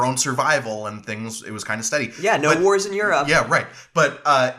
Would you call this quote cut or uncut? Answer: uncut